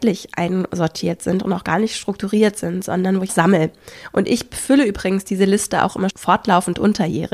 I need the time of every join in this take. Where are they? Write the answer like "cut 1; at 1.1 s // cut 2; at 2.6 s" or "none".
cut 1; at 3.3 s // cut 2; at 6.1 s